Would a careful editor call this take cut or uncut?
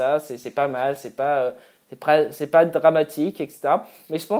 uncut